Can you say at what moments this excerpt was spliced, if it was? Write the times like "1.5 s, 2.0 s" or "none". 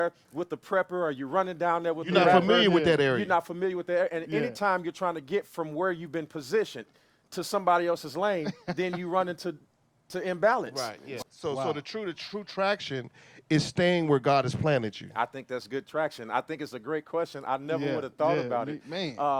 11.2 s